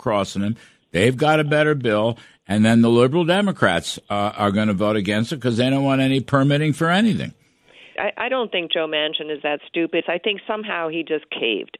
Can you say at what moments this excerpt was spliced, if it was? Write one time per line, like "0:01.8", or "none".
0:08.0
0:10.0